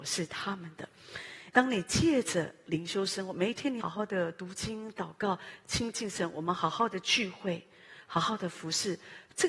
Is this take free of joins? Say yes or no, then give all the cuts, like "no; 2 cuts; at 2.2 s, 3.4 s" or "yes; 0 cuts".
no; 2 cuts; at 1.5 s, 3.8 s